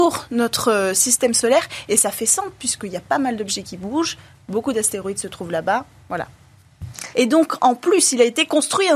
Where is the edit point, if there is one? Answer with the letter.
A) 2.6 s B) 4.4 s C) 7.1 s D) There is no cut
C